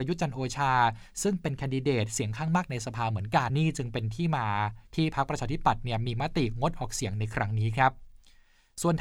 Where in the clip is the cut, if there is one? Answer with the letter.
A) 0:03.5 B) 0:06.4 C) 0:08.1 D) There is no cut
A